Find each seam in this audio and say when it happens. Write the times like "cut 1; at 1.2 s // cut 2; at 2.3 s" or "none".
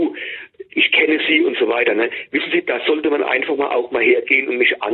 none